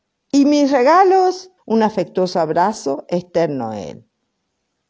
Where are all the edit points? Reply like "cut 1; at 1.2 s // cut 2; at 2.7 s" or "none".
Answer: cut 1; at 1.6 s